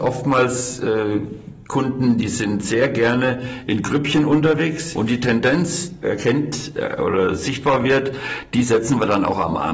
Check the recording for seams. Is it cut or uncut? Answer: cut